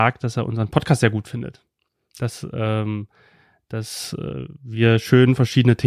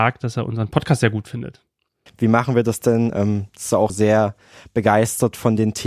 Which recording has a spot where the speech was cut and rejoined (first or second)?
second